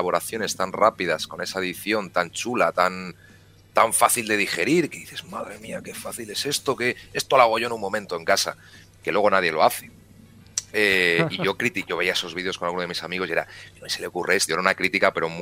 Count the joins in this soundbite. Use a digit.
1